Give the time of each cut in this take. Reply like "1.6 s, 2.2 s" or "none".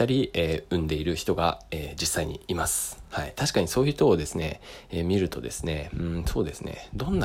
none